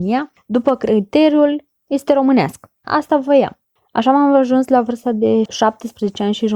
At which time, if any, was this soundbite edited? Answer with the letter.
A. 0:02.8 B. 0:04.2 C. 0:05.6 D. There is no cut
A